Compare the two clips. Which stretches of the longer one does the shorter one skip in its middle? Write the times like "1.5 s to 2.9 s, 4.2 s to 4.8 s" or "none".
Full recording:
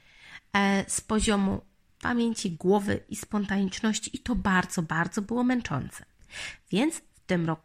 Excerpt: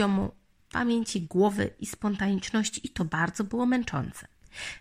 4.3 s to 4.8 s

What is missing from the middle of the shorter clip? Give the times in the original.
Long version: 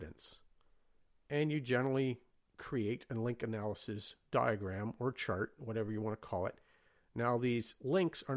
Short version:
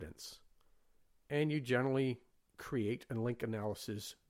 none

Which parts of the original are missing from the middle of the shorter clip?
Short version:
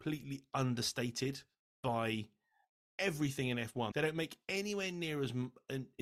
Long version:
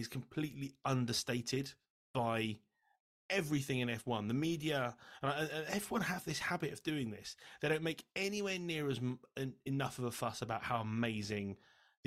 4.2 s to 7.6 s

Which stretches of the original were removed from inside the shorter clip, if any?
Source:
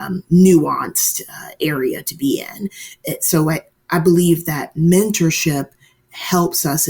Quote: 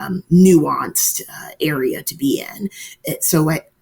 none

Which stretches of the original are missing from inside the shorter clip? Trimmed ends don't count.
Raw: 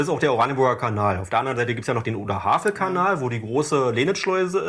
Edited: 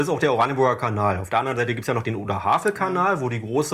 none

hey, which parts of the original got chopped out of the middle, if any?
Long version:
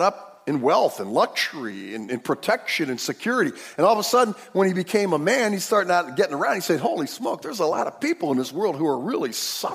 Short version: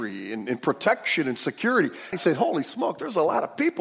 3.7 s to 6.6 s

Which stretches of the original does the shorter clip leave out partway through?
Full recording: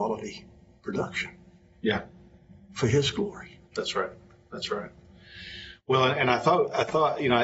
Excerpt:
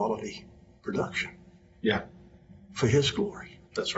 none

